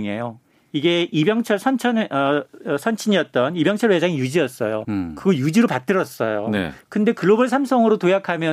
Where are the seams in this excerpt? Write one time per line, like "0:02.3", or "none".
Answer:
0:04.8